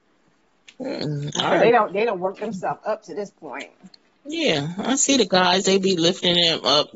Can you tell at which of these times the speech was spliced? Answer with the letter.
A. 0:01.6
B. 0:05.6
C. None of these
B